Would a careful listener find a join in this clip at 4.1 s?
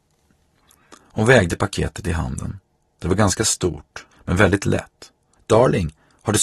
yes; 2 cuts; at 4.1 s, 5.4 s

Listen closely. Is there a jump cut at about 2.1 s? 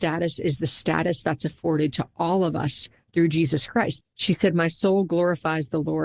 no; 1 cut; at 4.0 s

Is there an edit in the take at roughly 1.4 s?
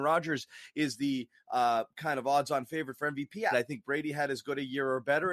no; 1 cut; at 3.5 s

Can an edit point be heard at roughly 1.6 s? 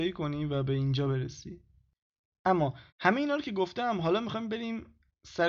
no; 1 cut; at 2.9 s

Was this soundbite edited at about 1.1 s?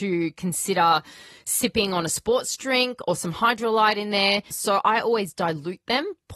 no; 1 cut; at 4.5 s

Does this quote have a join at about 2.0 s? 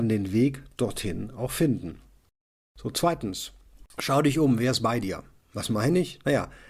no; 0 cuts

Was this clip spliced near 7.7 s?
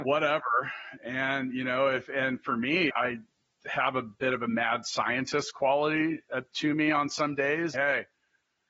yes; 2 cuts; at 2.9 s, 7.7 s

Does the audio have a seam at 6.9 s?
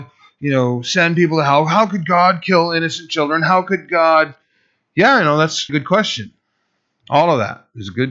no; 1 cut; at 5.7 s

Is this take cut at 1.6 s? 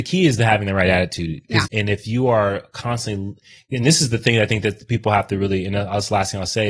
yes; 1 cut; at 1.6 s

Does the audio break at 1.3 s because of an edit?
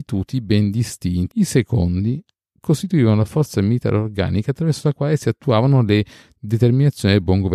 yes; 1 cut; at 1.3 s

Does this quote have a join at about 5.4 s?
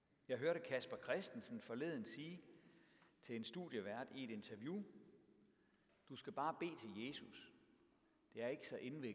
no; 0 cuts

